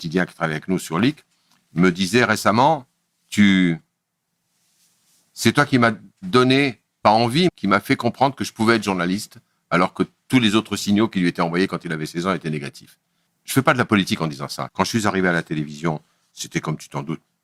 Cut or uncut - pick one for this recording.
cut